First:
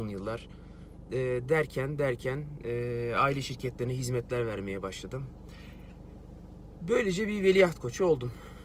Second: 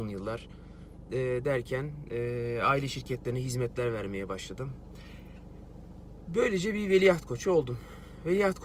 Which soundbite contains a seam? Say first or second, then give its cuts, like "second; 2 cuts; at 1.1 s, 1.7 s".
second; 1 cut; at 1.4 s